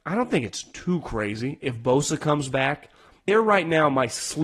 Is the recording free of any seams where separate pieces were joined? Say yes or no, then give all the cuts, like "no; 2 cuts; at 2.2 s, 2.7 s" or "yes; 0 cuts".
no; 1 cut; at 3.3 s